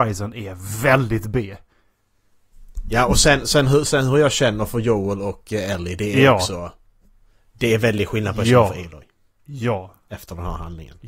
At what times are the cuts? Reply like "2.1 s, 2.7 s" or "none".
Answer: 3.4 s

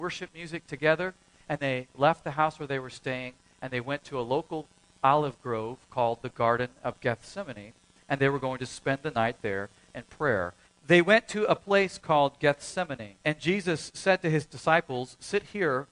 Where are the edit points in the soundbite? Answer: 1.6 s, 10.7 s, 13.2 s

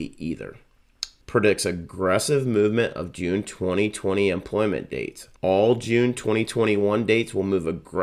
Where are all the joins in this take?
1.2 s, 5.4 s

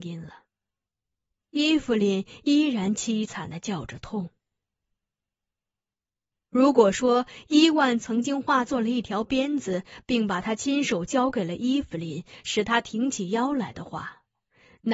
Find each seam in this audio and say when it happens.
none

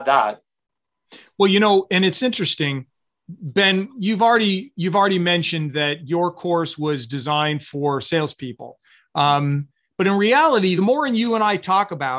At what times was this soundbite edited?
none

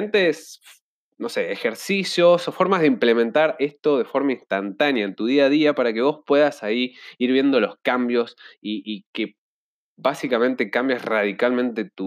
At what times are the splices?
none

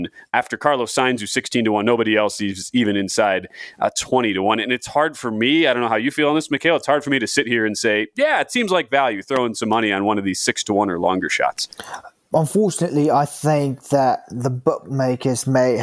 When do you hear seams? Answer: none

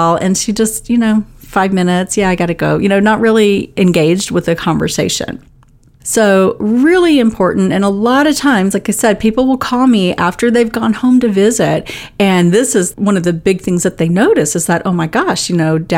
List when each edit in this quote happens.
6.0 s

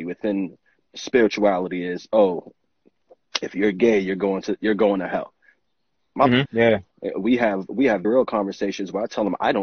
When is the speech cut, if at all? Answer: 6.5 s, 8.0 s

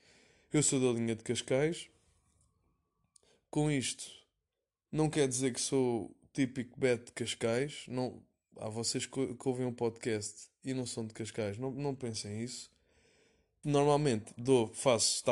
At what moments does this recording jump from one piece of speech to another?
13.6 s

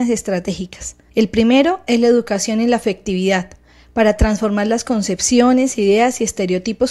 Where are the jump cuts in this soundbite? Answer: none

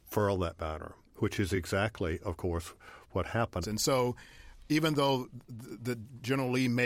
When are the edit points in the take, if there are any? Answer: 3.6 s

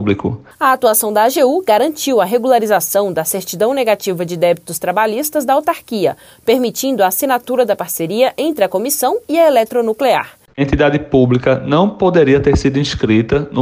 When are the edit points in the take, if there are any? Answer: 10.5 s

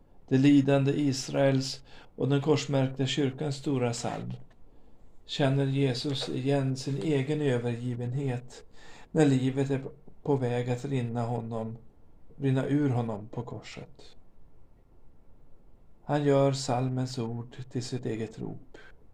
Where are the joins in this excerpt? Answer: 12.3 s

